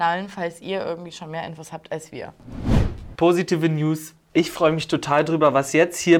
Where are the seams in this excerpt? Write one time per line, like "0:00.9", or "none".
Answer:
none